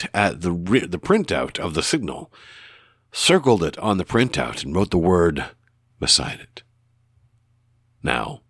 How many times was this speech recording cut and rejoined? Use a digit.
1